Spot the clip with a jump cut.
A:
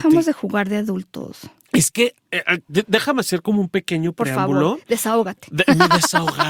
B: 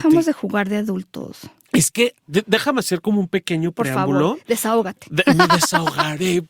B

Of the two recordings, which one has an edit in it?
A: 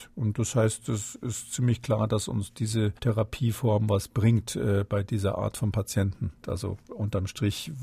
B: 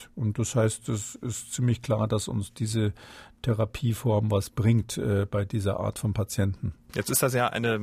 A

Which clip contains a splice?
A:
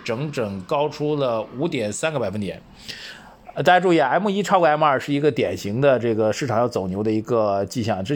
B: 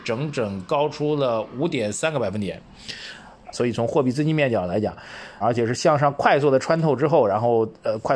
B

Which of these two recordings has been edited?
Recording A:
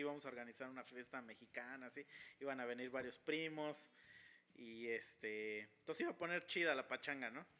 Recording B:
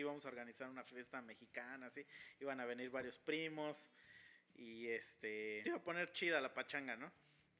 B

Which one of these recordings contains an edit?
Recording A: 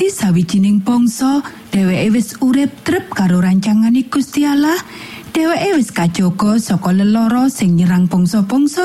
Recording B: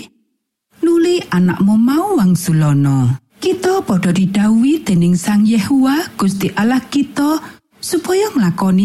B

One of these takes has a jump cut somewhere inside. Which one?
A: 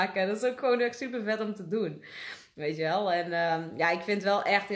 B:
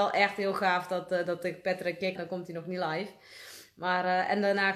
B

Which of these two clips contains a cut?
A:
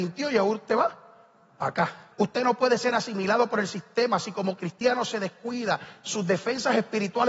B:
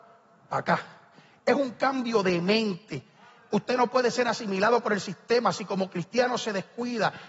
A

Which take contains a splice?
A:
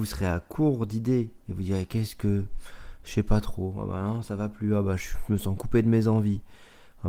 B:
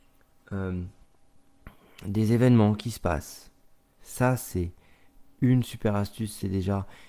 B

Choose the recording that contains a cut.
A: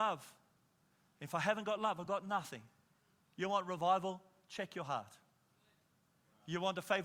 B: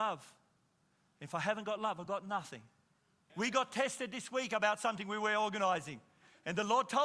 B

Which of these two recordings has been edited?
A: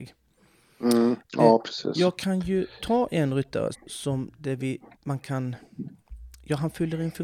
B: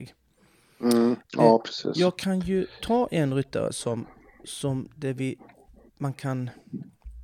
A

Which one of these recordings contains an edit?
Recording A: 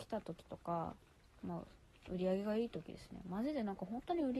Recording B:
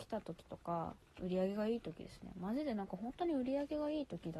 B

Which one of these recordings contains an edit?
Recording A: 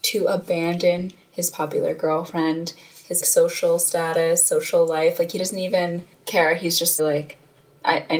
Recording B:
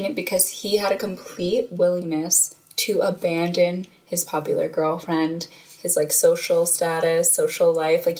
A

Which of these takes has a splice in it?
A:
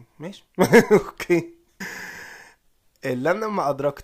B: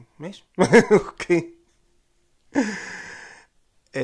A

